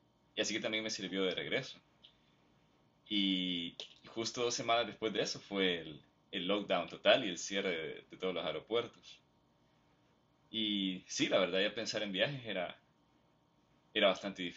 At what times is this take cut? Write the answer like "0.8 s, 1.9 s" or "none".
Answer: none